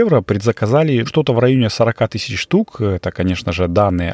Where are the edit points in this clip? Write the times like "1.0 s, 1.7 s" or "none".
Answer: 1.1 s